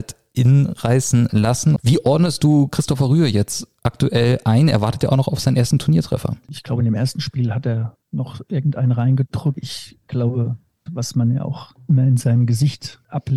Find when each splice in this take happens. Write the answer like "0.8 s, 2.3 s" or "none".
1.8 s, 10.9 s